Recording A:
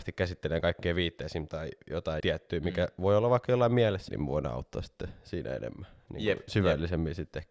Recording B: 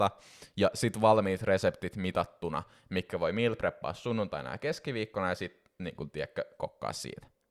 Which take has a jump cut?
A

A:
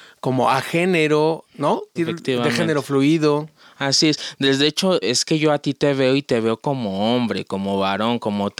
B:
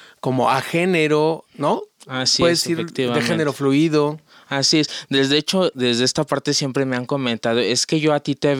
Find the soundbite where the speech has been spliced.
A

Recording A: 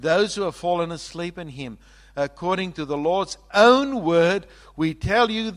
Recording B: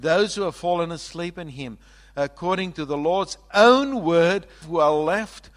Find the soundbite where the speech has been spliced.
B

